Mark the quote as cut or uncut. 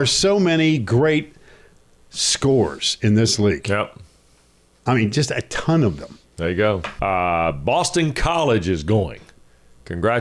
cut